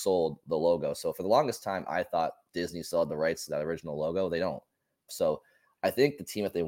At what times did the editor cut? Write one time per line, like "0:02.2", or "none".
0:05.1

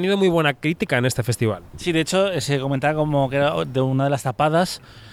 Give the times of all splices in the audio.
none

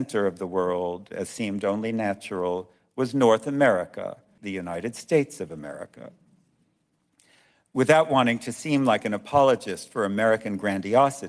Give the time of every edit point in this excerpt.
0:04.4

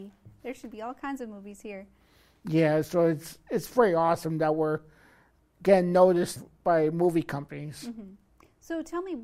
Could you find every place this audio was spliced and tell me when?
0:06.4

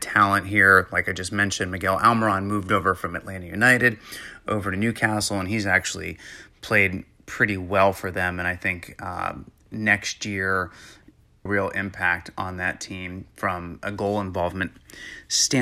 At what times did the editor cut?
0:11.5

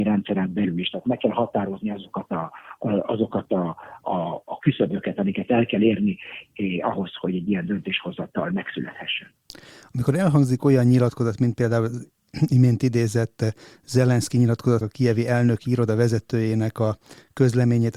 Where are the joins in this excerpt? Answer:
0:04.0
0:14.8

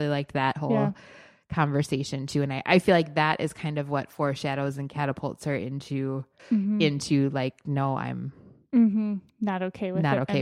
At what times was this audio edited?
0:06.4

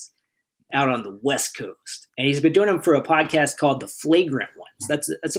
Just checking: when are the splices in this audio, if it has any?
0:02.1

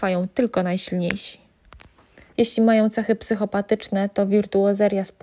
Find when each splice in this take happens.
0:02.3

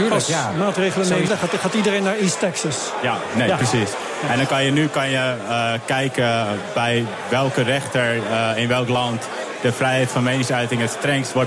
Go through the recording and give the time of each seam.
0:01.3

